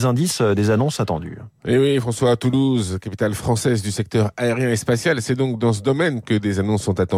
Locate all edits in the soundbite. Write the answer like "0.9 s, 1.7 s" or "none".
none